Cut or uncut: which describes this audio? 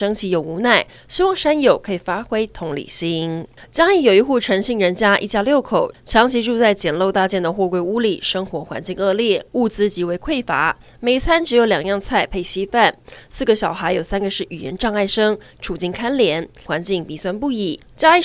cut